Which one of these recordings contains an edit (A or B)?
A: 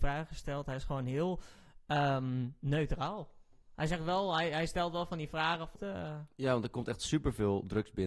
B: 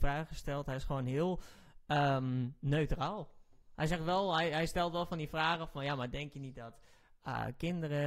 A